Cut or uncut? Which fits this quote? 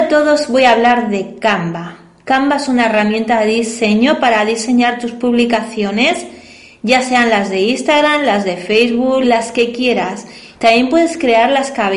cut